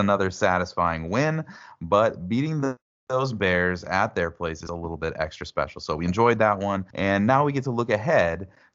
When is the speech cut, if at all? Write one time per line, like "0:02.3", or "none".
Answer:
0:04.7
0:06.9